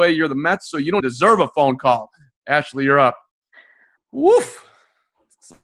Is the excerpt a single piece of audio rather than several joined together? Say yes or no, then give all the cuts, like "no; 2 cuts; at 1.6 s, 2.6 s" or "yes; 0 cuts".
no; 2 cuts; at 1.0 s, 4.0 s